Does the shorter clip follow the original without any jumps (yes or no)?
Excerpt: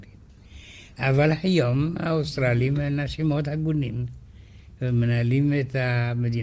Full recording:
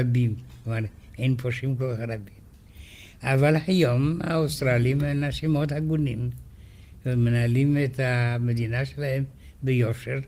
yes